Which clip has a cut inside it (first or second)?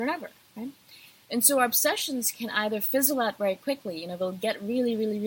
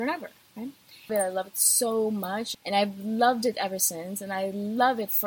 second